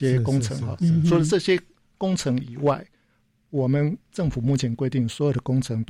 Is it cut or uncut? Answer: uncut